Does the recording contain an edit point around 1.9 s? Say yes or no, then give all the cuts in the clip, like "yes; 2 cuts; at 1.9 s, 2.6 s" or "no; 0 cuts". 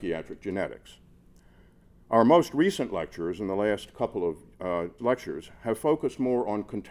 no; 1 cut; at 5.0 s